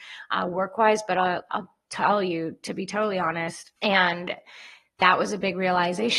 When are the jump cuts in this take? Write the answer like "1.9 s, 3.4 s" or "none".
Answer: 3.8 s